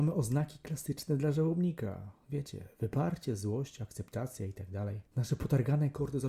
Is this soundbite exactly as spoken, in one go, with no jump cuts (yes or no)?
no